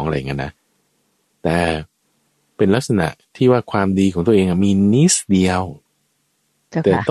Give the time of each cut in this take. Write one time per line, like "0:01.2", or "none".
none